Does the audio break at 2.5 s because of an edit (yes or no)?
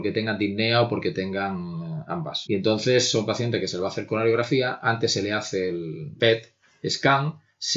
yes